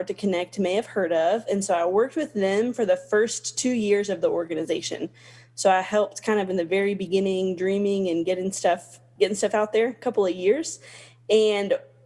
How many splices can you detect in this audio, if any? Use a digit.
1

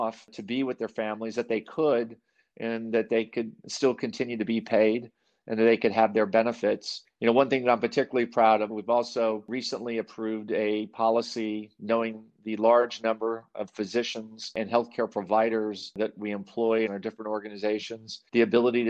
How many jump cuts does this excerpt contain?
1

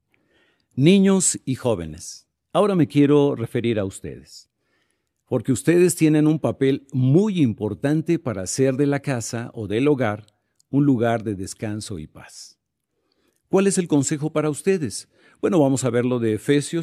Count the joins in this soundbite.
0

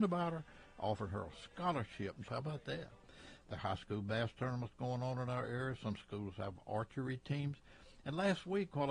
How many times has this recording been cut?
2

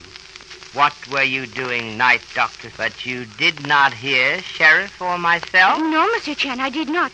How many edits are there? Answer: 1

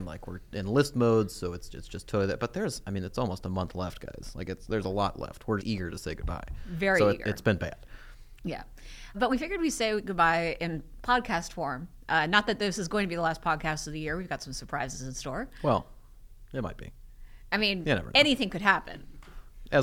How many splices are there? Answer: 2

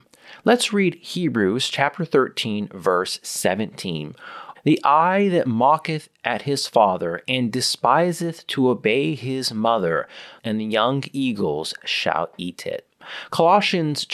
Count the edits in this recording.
2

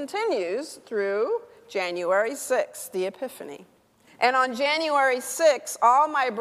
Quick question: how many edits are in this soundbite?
1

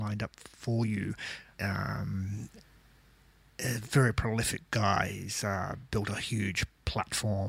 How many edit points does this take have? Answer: 1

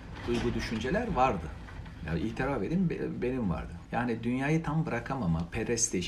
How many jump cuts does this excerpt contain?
1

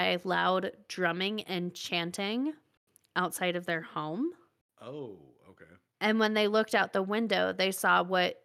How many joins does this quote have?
0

